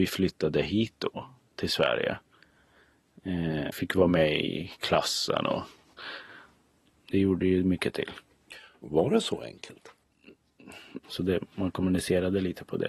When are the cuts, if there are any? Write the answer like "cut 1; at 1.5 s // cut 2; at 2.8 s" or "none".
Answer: cut 1; at 3.7 s // cut 2; at 11.0 s